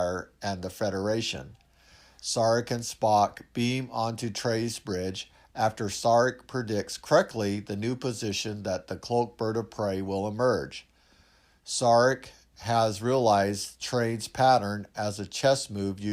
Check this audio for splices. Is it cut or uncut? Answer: uncut